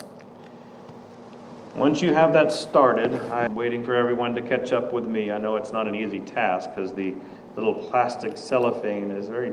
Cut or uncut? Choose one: cut